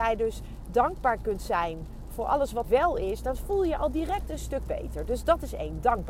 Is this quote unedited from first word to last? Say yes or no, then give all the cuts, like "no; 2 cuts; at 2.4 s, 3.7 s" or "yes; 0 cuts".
no; 1 cut; at 2.6 s